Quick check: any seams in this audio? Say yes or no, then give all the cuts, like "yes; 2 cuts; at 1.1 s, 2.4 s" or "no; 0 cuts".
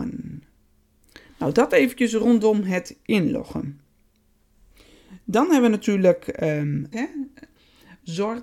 yes; 1 cut; at 6.9 s